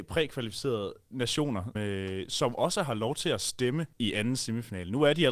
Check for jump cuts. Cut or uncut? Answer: cut